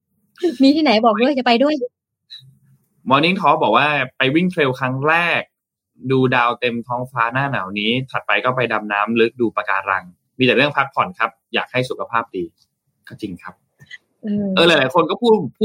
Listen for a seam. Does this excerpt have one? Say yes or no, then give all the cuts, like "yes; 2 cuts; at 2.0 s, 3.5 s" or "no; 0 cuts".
no; 0 cuts